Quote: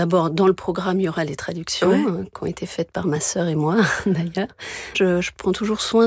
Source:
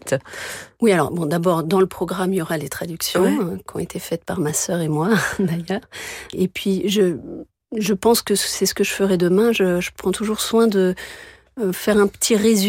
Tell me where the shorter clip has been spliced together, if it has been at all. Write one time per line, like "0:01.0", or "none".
0:04.9

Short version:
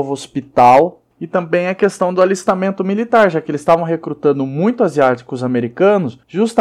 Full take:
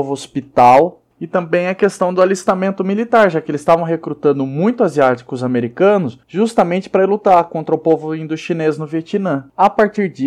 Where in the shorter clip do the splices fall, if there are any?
none

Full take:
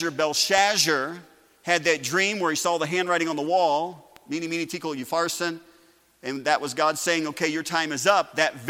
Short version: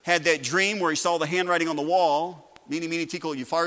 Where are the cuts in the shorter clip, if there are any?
none

